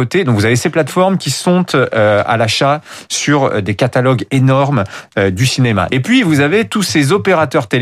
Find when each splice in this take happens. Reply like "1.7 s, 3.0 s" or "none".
5.9 s